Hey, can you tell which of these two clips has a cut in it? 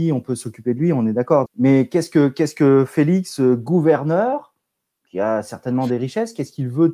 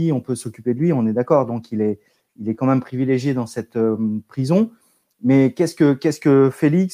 first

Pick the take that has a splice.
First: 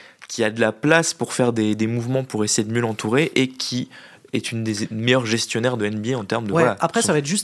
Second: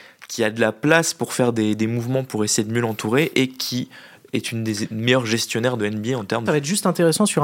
second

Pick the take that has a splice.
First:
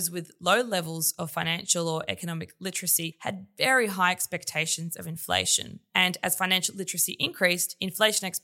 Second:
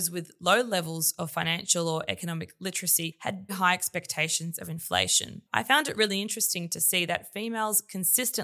second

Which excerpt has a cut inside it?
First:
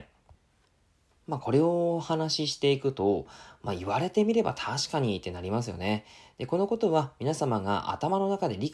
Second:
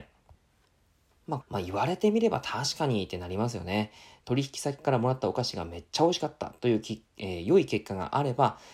second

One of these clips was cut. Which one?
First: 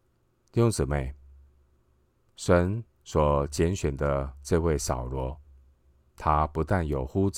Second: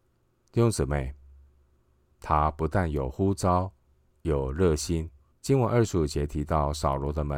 second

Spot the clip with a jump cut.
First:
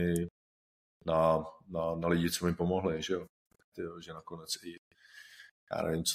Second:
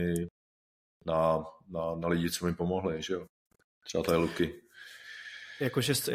first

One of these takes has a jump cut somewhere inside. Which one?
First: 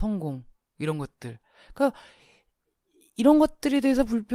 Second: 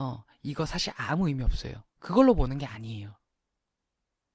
second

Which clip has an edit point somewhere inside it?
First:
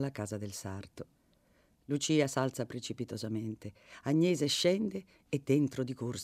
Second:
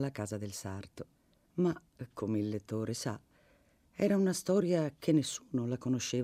second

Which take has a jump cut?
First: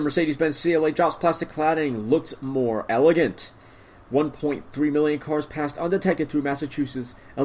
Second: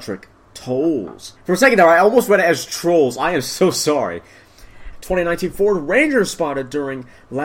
second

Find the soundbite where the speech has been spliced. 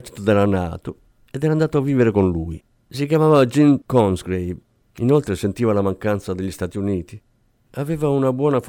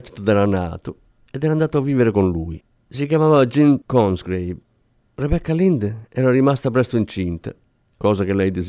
first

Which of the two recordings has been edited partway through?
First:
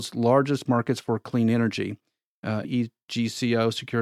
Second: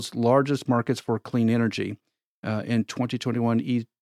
first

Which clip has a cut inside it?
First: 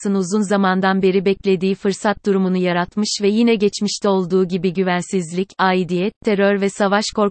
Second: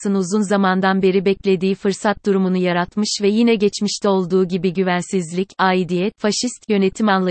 second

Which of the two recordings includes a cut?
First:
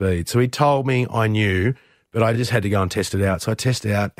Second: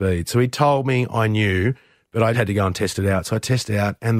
second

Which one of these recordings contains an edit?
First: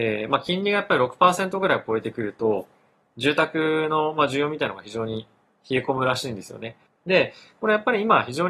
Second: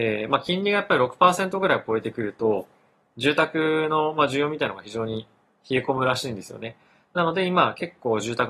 first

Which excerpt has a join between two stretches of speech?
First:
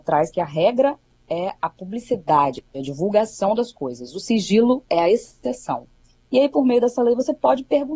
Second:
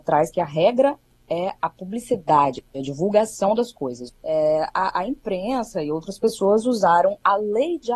second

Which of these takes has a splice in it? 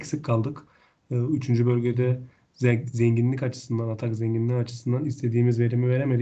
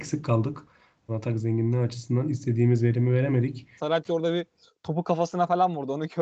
second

